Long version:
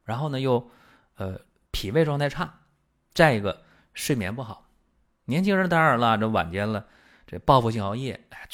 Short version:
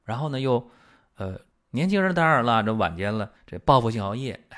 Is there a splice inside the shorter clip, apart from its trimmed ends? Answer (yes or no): yes